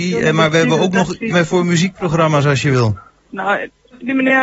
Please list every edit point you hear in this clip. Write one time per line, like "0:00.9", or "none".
0:01.3
0:03.3